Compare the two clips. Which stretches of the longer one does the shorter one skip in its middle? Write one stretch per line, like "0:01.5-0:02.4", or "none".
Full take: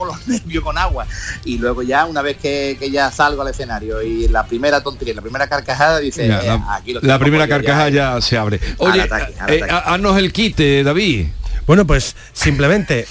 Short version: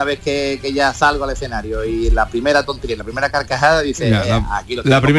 none